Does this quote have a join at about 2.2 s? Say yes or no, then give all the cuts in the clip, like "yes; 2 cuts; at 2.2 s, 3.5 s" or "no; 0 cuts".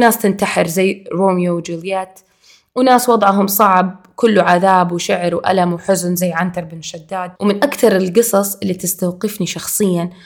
no; 1 cut; at 7.4 s